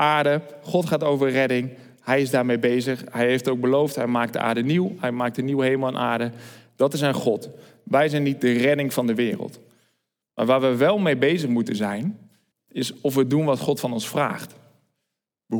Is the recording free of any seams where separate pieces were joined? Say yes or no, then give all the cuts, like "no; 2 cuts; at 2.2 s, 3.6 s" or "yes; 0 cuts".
no; 1 cut; at 12.5 s